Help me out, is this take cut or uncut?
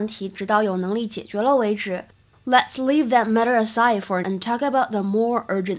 cut